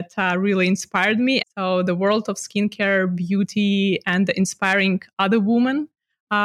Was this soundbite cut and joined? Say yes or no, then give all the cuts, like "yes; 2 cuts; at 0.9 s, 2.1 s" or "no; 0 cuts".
yes; 1 cut; at 1.4 s